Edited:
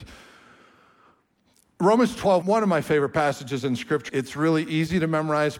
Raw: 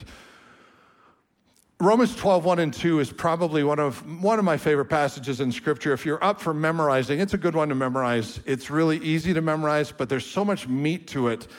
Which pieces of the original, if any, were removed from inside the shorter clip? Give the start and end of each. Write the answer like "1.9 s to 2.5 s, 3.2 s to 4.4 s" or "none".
2.4 s to 4.2 s, 5.8 s to 8.4 s

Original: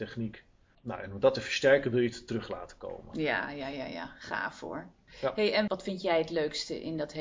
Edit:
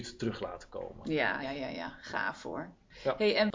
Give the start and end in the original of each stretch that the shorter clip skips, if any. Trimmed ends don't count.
3.5 s to 3.6 s

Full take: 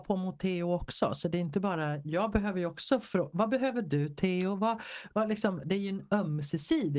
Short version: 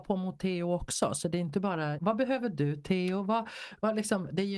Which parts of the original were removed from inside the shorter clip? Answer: 2.0 s to 3.3 s

